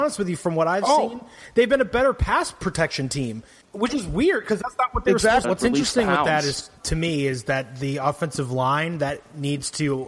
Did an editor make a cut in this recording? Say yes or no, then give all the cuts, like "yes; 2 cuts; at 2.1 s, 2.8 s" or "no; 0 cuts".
yes; 2 cuts; at 5.4 s, 6.8 s